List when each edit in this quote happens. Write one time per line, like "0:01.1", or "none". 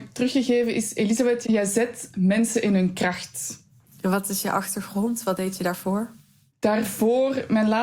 0:01.4
0:03.8